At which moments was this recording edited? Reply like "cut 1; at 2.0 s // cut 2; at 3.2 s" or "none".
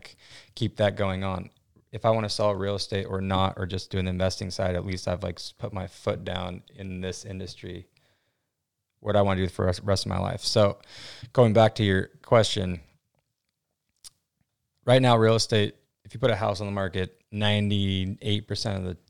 none